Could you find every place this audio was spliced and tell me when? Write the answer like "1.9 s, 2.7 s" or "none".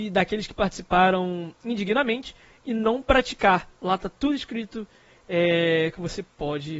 none